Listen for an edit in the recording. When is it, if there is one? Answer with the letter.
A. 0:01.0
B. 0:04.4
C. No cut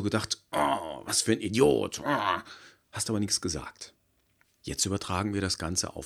B